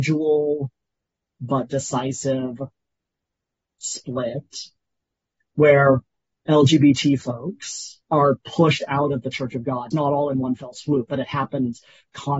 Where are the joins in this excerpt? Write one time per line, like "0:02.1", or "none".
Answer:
0:08.0
0:09.9